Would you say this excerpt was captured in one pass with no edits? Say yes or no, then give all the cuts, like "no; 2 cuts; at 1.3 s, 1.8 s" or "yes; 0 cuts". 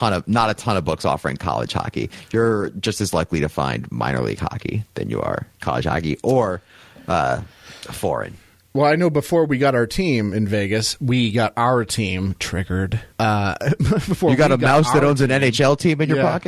no; 1 cut; at 13.1 s